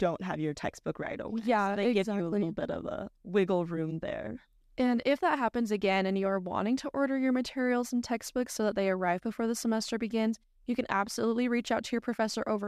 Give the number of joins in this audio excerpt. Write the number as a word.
zero